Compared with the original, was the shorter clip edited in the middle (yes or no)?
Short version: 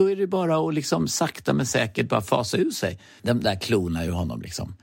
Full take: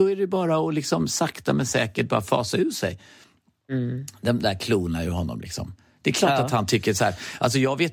yes